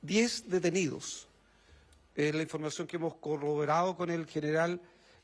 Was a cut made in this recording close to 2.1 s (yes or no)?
no